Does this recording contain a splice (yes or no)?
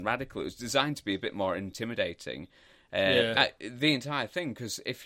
yes